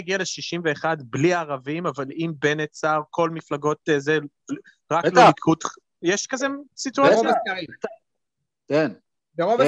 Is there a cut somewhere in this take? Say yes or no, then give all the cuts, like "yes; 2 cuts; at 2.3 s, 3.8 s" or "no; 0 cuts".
no; 0 cuts